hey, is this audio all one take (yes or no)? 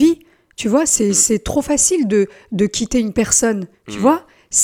yes